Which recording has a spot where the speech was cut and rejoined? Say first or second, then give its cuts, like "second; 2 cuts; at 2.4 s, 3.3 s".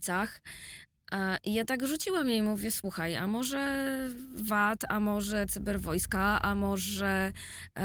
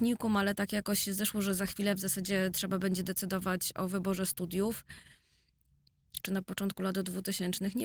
second; 1 cut; at 6.2 s